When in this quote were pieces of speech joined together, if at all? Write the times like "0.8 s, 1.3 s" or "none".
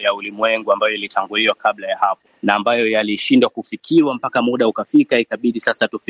none